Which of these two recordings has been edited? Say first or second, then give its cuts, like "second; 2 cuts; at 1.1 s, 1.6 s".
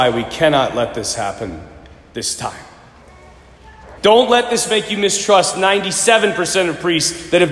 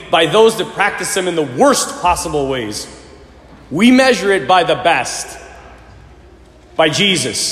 first; 1 cut; at 4.0 s